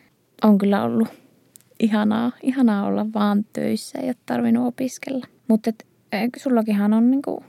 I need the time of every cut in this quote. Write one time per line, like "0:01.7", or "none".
0:05.4